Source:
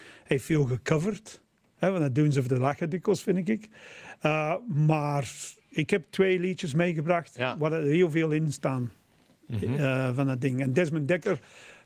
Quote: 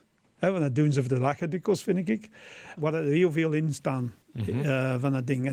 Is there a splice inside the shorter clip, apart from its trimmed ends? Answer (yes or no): yes